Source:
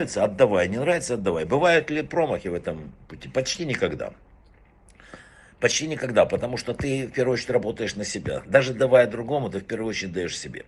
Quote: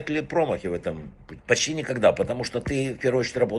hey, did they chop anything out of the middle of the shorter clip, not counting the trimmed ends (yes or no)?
yes